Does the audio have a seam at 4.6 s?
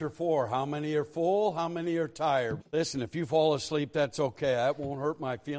no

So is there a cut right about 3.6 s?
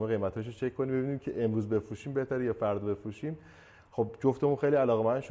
no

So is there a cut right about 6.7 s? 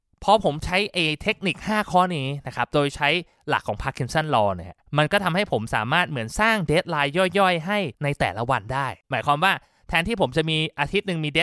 no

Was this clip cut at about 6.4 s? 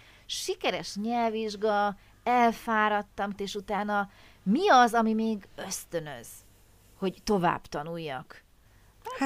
no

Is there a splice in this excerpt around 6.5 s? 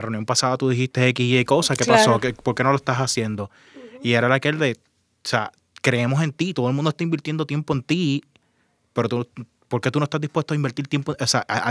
no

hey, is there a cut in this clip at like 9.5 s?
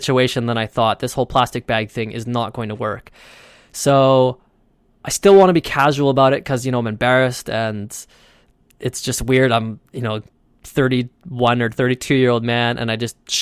no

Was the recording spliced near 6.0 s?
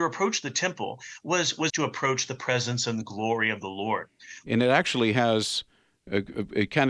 no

